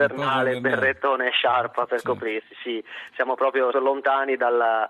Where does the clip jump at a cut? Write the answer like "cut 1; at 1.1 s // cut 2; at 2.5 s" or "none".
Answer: cut 1; at 3.7 s